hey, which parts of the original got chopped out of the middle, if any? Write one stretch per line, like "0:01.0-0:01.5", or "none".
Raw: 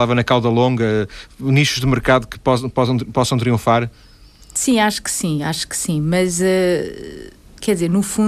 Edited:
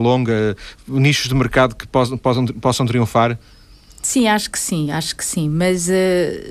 none